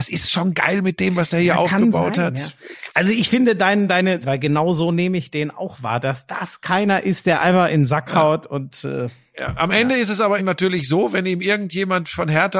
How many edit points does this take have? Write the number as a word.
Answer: two